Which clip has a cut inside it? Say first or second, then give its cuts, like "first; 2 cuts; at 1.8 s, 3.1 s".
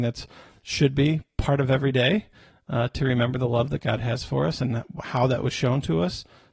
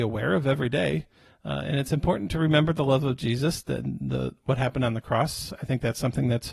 second; 1 cut; at 1.3 s